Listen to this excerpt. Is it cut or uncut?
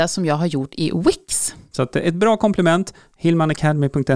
cut